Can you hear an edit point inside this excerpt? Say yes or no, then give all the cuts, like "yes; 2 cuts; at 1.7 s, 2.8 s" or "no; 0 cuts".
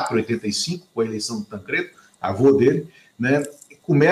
no; 0 cuts